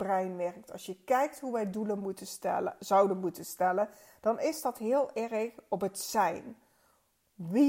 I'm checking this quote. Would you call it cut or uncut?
uncut